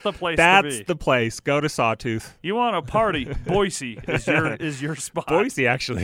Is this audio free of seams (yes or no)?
yes